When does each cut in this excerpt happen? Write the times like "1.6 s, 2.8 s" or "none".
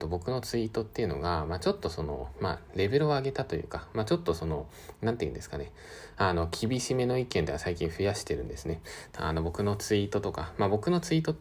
9.1 s